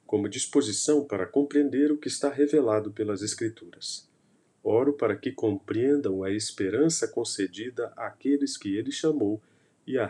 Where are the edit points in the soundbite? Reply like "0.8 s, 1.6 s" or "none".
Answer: 4.5 s

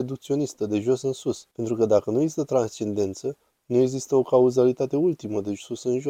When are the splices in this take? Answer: 1.5 s

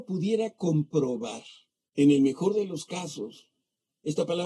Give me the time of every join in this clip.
1.9 s

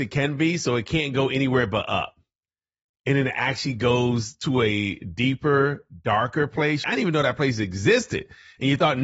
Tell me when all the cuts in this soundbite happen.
6.8 s

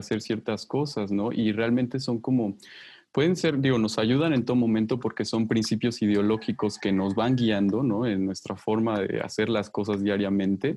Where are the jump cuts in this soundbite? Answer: none

